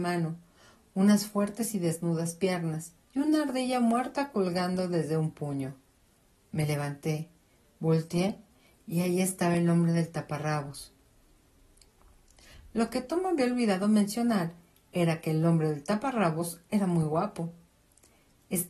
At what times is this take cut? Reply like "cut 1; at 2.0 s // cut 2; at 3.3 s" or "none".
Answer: cut 1; at 3.0 s